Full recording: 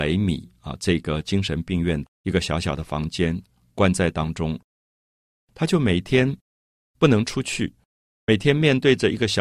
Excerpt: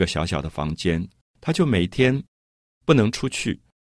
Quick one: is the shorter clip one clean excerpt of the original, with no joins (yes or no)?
no